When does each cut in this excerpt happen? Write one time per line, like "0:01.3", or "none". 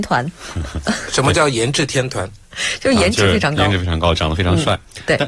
none